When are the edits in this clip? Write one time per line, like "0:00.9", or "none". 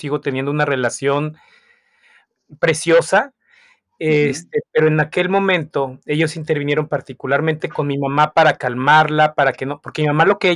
none